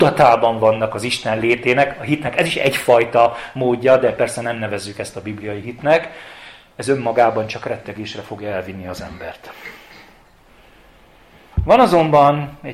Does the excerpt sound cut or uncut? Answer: uncut